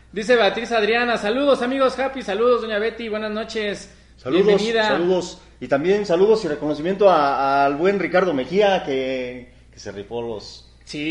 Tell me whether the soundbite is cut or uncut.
uncut